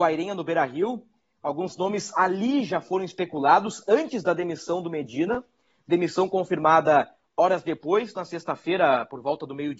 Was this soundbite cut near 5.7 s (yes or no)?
no